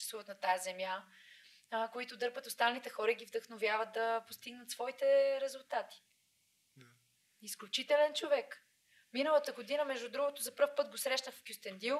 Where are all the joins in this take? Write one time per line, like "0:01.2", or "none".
none

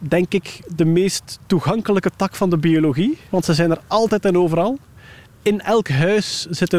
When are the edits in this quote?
0:03.3

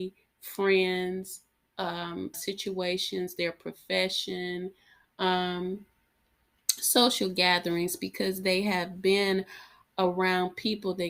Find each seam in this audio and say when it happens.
0:02.3

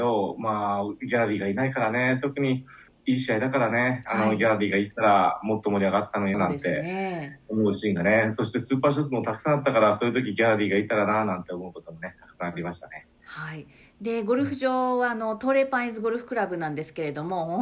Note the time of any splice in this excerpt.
0:06.3

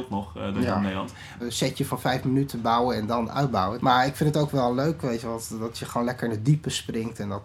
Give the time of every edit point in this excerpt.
0:01.4
0:03.8

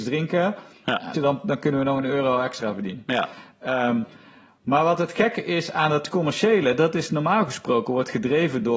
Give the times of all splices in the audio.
0:01.1

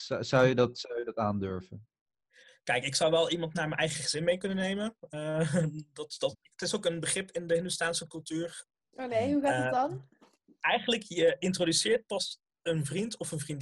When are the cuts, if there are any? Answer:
0:06.3
0:08.8

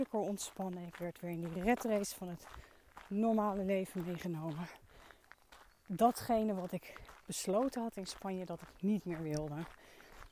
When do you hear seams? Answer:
none

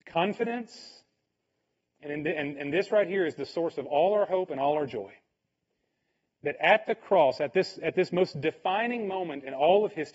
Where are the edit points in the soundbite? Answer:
none

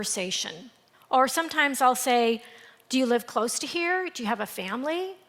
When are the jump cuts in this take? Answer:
0:00.9

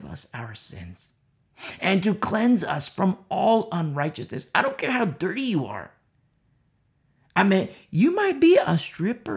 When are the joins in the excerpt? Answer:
none

